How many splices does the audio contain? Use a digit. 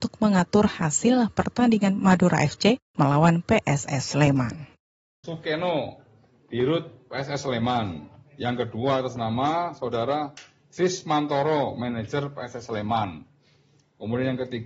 1